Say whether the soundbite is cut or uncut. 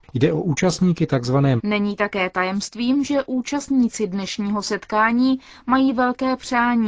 cut